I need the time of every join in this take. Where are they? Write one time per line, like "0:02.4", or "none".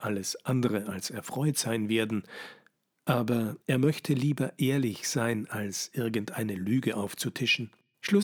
0:03.6